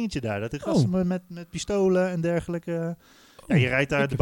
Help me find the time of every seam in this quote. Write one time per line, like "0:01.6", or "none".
none

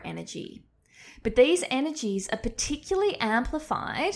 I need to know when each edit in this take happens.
none

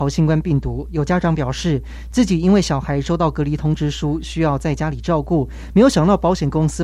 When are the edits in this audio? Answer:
none

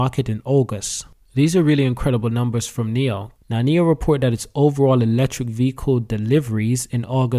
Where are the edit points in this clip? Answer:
0:03.4

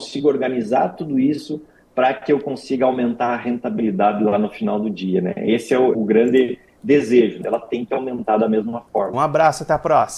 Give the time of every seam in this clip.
0:05.9
0:07.4
0:09.1

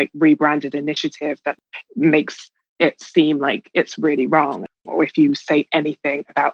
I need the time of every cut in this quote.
0:04.9

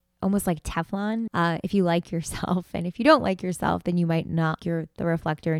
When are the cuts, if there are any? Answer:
0:01.3
0:04.6

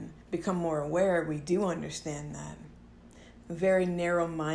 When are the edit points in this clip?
0:03.4

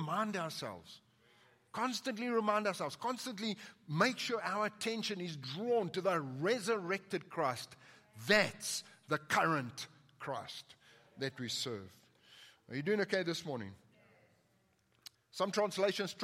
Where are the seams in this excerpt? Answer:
0:15.1

